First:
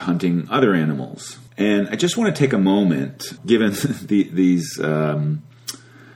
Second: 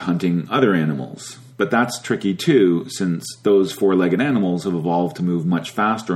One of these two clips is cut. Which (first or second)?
first